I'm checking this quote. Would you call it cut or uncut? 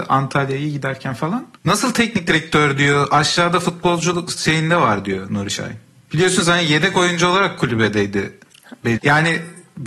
cut